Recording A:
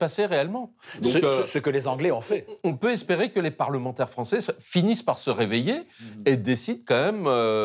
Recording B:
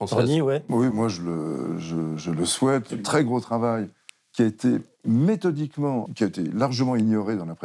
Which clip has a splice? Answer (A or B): B